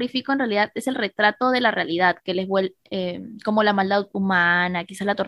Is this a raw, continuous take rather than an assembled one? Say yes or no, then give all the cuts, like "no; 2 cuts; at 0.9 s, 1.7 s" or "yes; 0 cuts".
yes; 0 cuts